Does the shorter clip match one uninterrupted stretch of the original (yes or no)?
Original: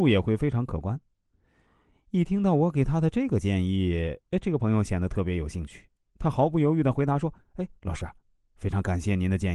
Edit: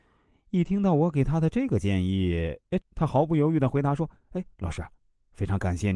no